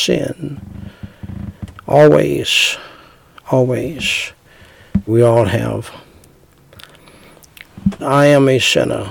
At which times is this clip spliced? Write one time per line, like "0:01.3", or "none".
0:05.1
0:08.0